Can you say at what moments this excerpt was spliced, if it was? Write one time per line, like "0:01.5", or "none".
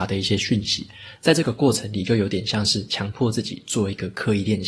0:01.2